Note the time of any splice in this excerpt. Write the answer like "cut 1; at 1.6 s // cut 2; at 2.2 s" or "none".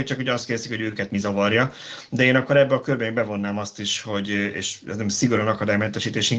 none